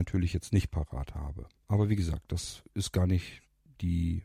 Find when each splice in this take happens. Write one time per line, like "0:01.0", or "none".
none